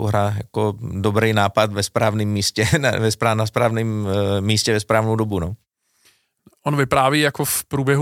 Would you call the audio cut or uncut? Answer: uncut